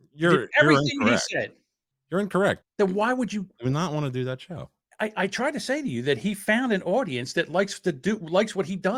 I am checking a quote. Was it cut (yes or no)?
yes